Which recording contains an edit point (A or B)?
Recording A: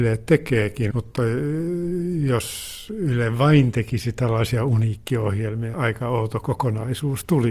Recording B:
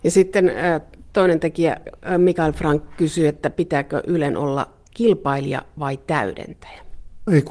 A